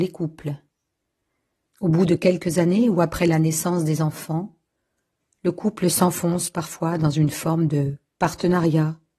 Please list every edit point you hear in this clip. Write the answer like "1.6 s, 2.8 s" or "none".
1.7 s